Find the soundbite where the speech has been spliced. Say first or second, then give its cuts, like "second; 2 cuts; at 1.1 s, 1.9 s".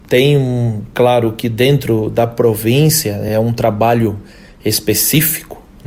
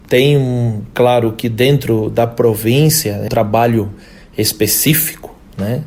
second; 1 cut; at 3.3 s